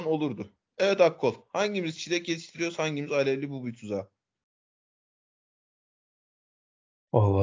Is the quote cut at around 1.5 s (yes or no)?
no